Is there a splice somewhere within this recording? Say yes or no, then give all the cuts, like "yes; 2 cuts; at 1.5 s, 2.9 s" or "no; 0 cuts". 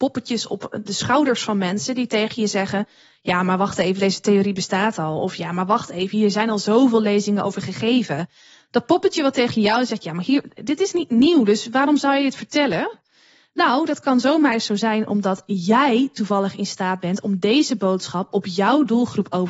no; 0 cuts